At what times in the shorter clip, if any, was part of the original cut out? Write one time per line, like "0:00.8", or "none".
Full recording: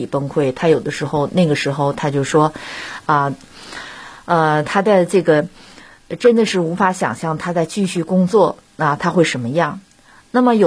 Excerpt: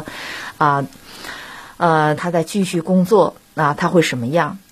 0:02.2